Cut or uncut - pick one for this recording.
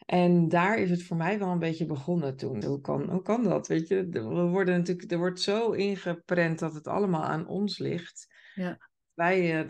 cut